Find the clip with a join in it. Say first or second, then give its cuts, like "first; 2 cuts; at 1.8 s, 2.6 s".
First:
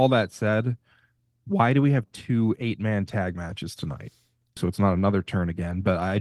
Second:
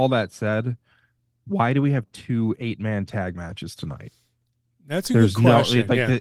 first; 1 cut; at 4.6 s